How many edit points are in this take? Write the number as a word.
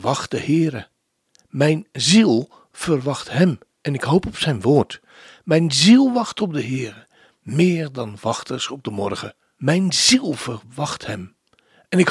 one